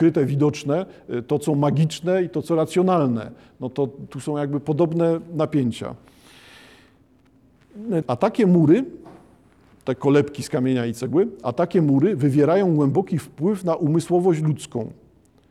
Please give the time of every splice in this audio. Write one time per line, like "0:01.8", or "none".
0:08.0